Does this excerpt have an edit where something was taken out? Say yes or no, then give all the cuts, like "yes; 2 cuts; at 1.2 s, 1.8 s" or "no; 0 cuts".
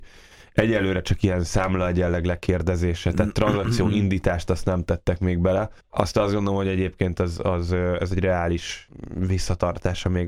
yes; 1 cut; at 5.8 s